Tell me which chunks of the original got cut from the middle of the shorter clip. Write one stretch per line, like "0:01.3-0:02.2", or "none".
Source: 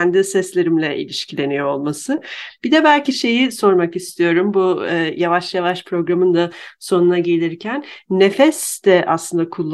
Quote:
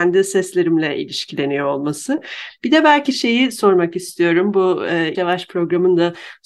0:05.1-0:05.5